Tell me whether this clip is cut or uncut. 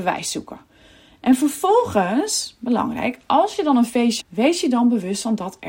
cut